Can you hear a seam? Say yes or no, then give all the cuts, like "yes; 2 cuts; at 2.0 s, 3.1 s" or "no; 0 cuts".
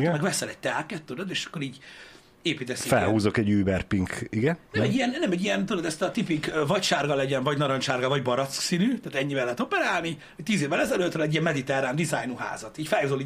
no; 0 cuts